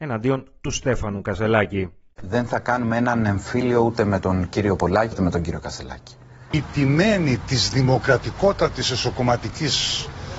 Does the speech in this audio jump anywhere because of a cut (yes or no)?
yes